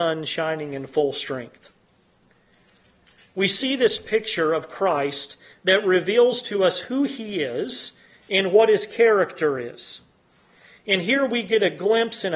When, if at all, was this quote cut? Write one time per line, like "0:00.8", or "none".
none